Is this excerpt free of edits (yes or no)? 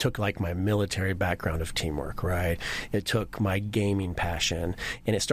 yes